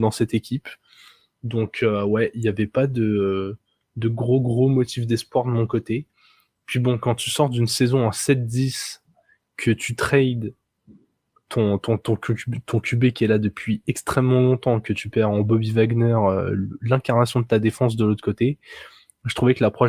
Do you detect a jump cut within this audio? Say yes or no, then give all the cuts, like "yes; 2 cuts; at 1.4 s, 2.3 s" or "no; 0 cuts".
no; 0 cuts